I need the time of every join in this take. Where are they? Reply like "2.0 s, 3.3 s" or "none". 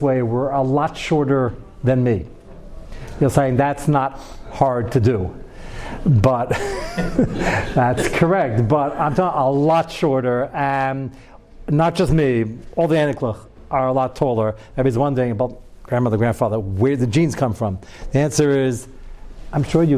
none